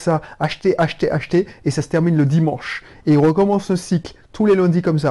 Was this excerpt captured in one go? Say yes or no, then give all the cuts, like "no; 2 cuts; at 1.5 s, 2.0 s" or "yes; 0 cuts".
yes; 0 cuts